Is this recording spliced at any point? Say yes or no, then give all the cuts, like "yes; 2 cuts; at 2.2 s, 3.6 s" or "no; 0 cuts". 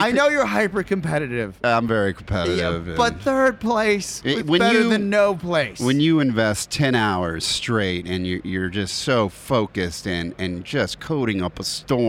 no; 0 cuts